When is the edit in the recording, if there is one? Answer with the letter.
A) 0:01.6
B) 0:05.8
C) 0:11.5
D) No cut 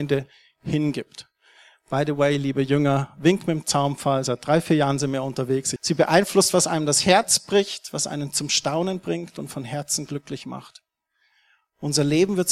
B